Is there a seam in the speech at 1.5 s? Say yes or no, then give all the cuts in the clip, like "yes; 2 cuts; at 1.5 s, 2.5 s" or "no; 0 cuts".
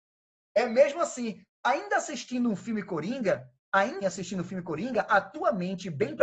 no; 1 cut; at 4.0 s